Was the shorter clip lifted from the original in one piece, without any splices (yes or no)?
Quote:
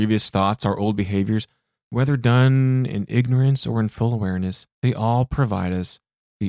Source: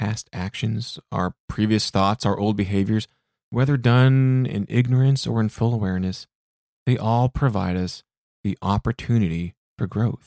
no